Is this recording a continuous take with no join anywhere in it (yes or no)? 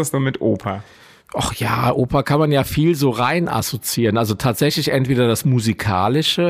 yes